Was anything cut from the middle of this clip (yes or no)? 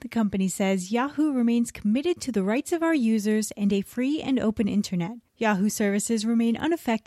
yes